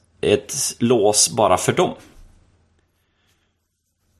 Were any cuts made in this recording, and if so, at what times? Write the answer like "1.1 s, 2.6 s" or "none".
none